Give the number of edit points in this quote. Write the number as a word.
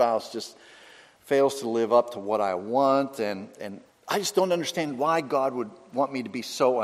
one